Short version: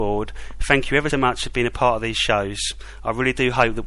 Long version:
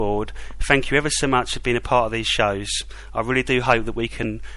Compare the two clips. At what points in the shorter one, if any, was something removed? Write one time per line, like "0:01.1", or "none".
0:01.1

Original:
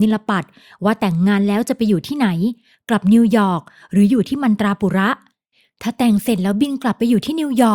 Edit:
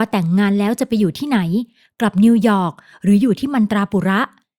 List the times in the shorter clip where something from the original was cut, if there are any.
none

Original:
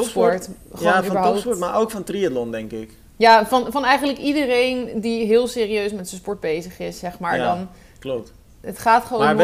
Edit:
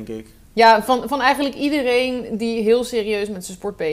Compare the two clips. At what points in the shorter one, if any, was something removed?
none

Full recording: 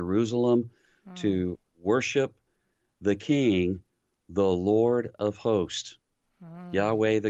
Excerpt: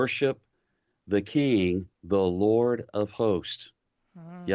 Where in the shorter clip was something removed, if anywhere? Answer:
0:01.9

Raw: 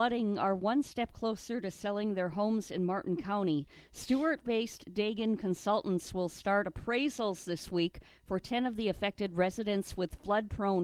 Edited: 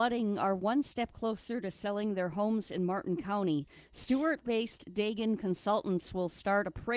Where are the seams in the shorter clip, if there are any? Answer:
none

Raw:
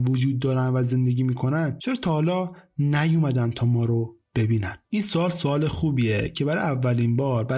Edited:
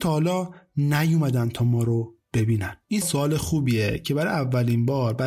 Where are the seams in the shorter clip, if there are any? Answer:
0:03.0

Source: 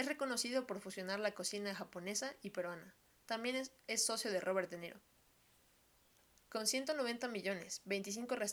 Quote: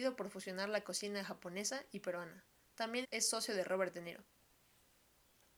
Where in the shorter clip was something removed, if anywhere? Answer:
0:03.0

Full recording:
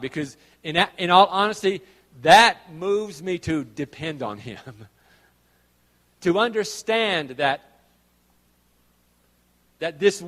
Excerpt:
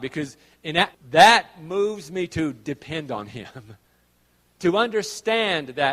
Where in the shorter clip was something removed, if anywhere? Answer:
0:00.9
0:03.8

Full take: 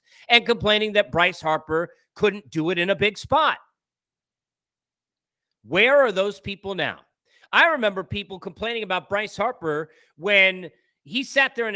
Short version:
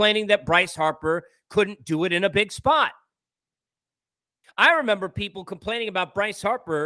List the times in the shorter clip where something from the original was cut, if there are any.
0:04.4

